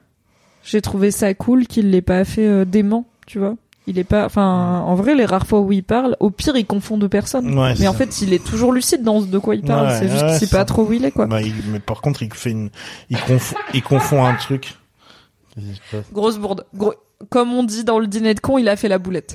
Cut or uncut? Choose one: uncut